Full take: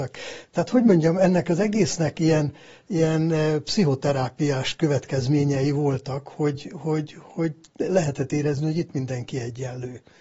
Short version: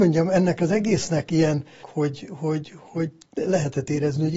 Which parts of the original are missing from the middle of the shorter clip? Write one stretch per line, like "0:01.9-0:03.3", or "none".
0:02.7-0:06.2